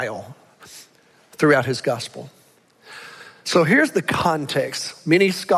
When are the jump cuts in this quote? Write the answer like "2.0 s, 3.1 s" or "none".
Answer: 3.4 s